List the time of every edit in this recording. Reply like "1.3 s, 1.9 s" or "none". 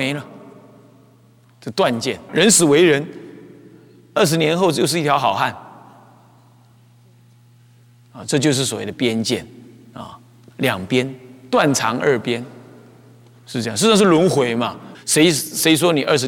2.3 s, 14.9 s